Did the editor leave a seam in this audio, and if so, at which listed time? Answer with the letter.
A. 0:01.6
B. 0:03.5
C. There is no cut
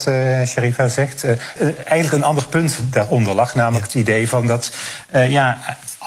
A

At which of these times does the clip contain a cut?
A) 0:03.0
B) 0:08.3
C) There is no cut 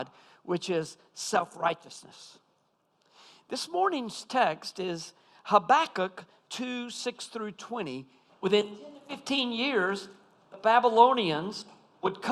B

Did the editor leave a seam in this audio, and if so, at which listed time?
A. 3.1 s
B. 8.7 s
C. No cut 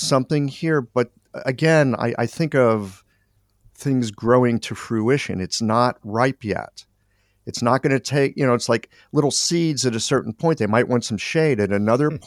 C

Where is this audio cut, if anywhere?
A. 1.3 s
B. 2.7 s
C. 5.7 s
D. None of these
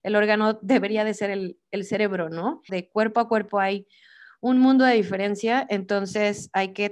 B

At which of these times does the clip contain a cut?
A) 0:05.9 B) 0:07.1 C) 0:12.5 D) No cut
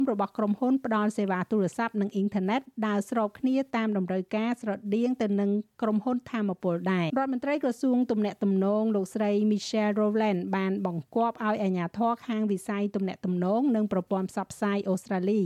B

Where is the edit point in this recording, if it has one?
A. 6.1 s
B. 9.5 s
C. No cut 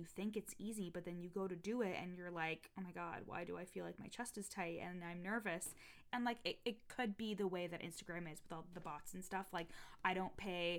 A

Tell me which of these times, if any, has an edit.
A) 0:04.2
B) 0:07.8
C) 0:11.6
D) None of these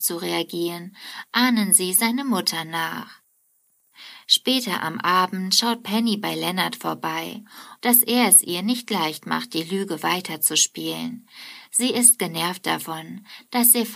B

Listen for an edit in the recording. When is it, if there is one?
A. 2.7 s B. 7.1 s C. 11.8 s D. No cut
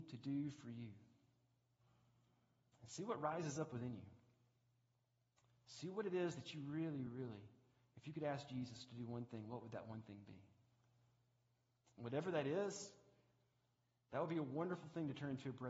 B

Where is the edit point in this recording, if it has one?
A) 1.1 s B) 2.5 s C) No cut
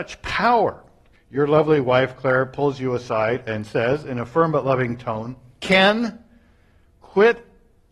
A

